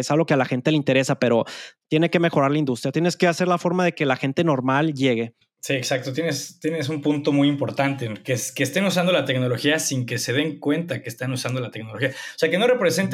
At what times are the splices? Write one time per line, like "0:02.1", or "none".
0:05.4